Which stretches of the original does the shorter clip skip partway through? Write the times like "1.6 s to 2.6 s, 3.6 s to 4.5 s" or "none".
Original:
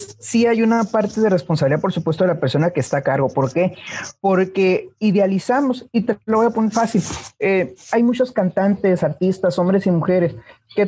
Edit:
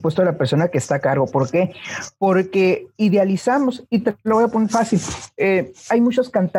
none